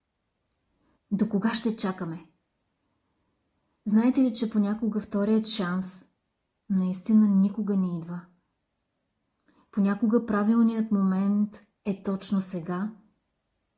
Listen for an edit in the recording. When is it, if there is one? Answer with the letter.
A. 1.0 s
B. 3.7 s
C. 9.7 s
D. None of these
A